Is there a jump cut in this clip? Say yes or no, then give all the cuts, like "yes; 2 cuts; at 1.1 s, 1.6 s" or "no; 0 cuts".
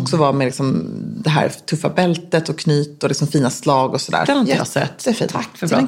yes; 1 cut; at 4.2 s